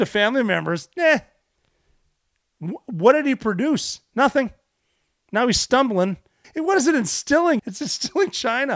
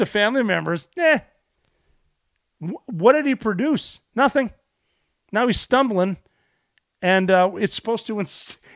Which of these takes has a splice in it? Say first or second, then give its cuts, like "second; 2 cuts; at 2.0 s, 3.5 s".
first; 2 cuts; at 6.4 s, 7.6 s